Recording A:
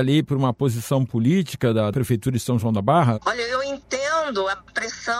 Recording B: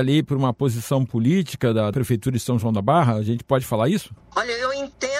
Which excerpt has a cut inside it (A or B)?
A